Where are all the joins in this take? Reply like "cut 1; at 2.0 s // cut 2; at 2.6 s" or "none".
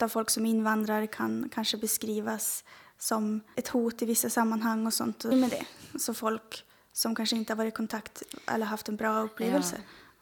cut 1; at 3.5 s // cut 2; at 5.3 s